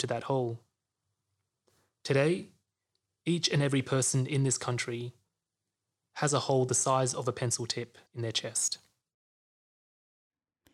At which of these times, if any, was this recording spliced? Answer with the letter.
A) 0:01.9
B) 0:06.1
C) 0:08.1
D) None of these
C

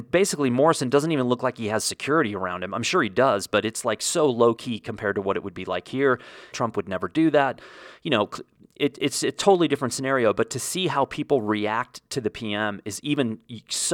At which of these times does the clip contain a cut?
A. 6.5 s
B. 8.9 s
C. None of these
A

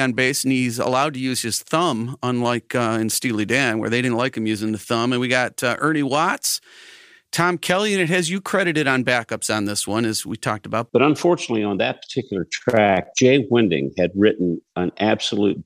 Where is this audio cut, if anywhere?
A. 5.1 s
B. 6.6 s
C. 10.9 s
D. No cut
C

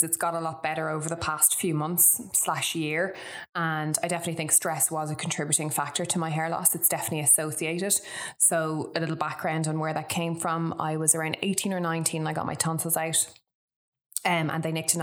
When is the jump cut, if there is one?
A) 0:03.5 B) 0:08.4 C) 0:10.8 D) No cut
D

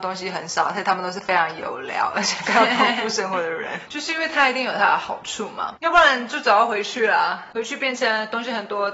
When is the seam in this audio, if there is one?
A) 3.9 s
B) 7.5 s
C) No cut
A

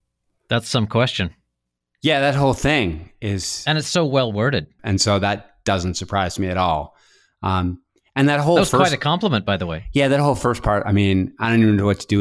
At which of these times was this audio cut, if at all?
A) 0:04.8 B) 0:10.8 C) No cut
A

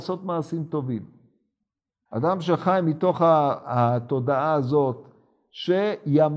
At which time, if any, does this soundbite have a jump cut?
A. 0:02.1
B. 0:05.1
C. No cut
A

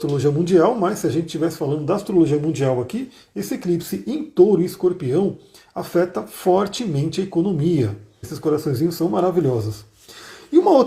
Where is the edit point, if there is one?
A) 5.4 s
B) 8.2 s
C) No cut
B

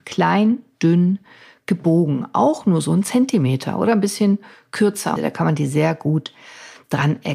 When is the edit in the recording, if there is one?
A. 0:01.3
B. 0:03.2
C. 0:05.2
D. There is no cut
C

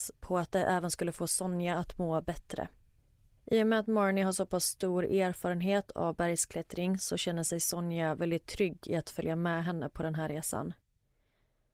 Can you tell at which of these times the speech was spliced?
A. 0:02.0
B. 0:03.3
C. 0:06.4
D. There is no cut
B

